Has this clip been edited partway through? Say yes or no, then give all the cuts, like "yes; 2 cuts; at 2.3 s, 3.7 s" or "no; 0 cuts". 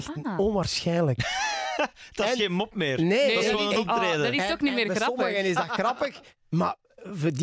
no; 0 cuts